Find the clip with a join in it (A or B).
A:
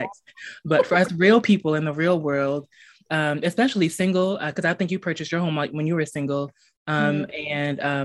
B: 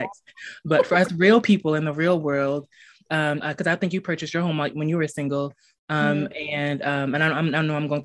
B